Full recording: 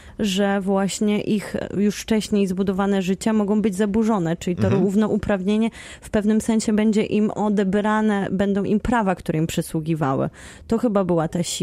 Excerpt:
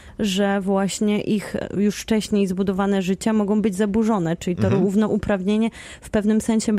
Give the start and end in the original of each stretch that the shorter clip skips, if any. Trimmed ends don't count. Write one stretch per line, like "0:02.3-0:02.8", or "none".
none

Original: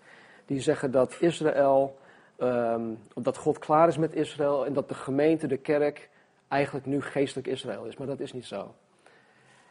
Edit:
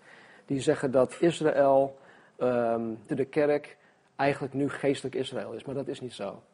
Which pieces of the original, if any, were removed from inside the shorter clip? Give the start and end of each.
0:03.1-0:05.4

